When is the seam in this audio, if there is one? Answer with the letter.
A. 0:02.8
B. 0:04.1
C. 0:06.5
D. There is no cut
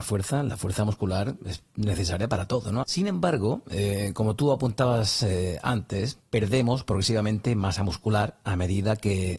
A